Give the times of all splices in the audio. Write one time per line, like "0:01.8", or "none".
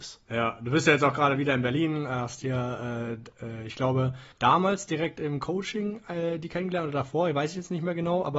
0:04.3